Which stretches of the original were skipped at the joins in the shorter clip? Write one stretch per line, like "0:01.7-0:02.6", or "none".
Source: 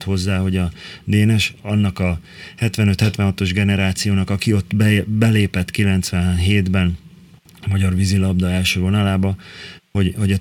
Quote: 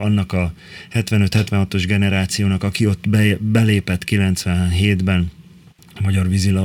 none